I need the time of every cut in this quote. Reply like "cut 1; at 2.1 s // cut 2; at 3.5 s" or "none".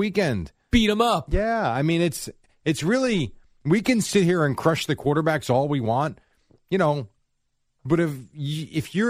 none